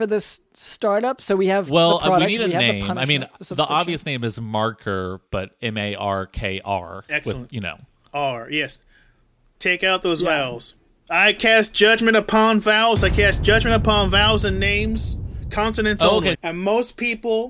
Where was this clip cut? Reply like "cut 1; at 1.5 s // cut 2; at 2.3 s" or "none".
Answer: cut 1; at 16.3 s